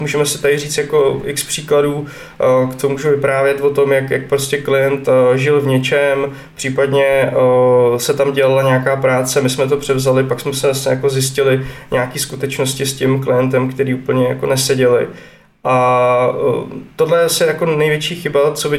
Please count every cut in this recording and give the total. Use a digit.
0